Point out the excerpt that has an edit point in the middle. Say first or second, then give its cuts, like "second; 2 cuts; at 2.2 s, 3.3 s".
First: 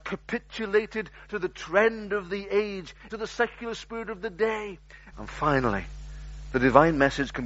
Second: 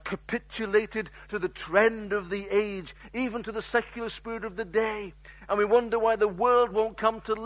first; 2 cuts; at 3.1 s, 5.1 s